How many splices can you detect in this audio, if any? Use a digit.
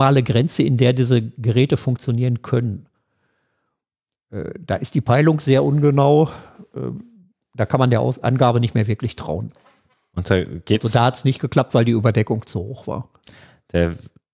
0